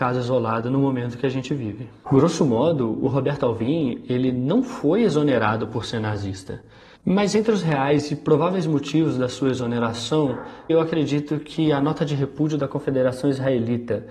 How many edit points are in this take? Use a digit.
1